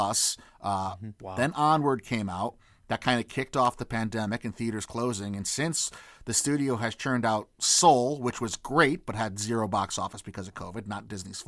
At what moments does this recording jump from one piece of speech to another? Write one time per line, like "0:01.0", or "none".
0:01.2